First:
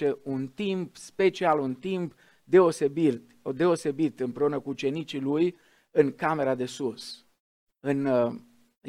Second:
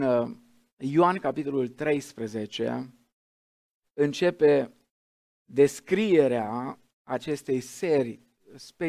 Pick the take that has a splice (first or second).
first